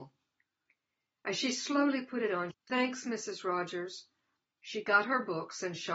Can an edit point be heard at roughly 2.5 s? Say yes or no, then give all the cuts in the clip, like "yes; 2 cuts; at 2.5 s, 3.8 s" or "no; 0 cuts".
yes; 2 cuts; at 2.5 s, 4.4 s